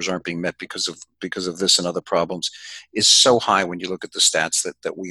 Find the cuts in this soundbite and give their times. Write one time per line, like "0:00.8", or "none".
none